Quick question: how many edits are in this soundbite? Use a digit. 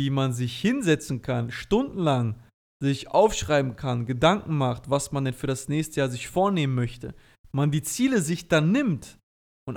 0